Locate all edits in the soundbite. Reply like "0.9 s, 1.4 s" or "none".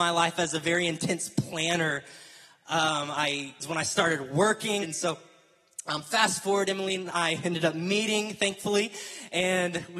3.6 s, 4.8 s